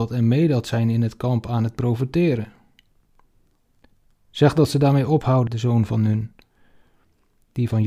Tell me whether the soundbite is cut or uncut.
cut